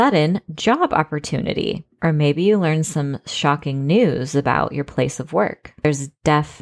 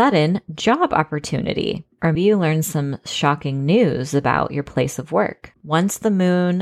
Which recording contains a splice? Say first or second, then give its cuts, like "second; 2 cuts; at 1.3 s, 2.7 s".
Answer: second; 2 cuts; at 2.2 s, 5.5 s